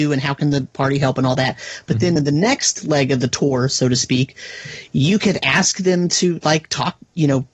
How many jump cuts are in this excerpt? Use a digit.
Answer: 0